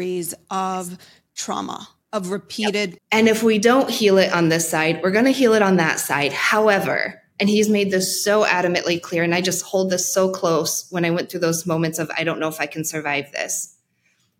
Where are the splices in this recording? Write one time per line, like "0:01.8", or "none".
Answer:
0:03.0